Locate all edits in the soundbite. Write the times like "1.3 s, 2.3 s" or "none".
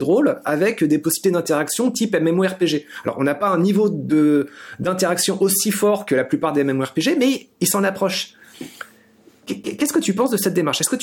none